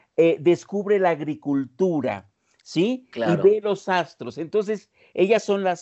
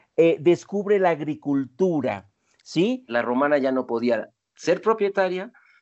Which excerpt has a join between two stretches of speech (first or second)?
second